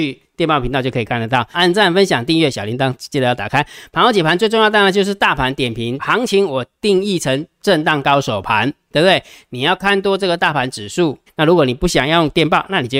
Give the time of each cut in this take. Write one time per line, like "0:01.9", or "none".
0:01.5
0:06.0
0:11.3